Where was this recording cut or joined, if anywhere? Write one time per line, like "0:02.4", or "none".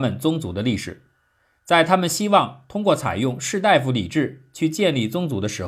none